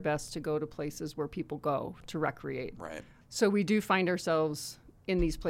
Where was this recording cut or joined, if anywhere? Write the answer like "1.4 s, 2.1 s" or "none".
3.2 s